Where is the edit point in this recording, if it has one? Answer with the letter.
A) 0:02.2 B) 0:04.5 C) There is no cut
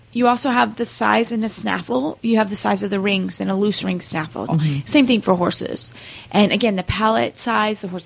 B